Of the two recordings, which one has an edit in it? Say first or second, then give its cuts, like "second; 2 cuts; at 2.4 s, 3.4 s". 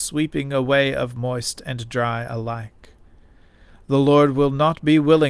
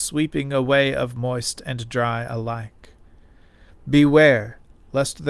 second; 1 cut; at 3.7 s